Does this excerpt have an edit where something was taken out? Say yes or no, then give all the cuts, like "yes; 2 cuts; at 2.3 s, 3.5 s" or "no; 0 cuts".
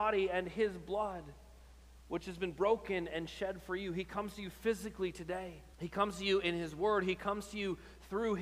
yes; 1 cut; at 5.7 s